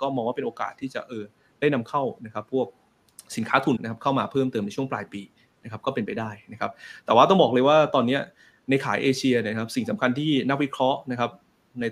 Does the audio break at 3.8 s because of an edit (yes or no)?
yes